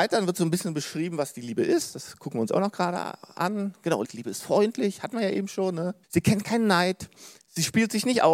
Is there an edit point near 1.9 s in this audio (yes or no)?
no